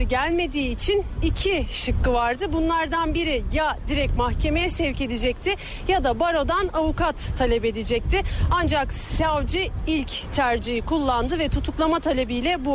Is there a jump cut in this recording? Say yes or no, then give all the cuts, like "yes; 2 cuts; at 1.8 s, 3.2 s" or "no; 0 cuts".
no; 0 cuts